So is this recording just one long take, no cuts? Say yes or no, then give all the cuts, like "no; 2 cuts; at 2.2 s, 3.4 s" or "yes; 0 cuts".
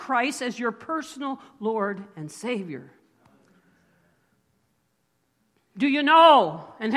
yes; 0 cuts